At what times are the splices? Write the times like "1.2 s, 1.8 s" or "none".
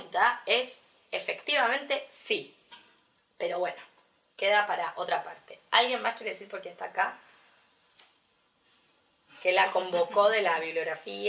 none